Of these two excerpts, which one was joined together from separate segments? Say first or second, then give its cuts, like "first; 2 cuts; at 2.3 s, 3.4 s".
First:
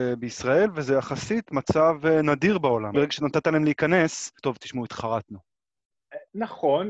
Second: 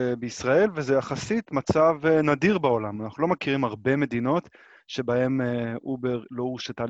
first; 2 cuts; at 2.9 s, 4.4 s